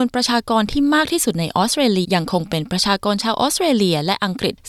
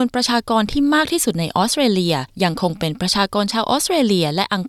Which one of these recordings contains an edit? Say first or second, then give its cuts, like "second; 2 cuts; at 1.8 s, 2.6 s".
first; 1 cut; at 2.0 s